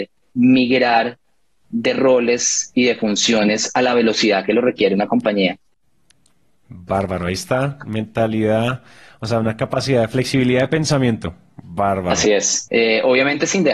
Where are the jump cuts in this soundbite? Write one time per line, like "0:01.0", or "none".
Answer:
0:12.7